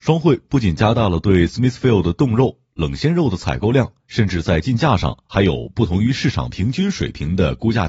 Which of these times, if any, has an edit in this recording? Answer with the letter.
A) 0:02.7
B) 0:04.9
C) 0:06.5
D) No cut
D